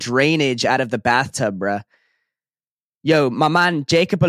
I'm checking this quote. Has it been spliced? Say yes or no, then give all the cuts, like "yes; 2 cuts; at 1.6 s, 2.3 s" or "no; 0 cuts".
no; 0 cuts